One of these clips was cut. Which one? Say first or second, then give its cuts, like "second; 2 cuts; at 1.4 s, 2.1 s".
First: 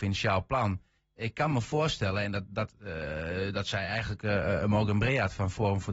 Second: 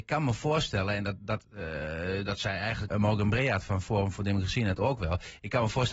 second; 1 cut; at 2.9 s